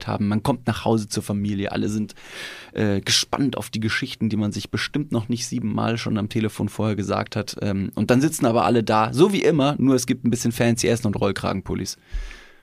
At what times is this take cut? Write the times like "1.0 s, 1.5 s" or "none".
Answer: none